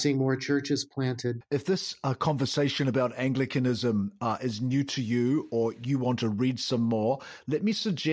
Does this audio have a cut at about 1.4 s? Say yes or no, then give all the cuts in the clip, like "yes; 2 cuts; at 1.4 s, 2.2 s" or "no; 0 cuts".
yes; 1 cut; at 1.4 s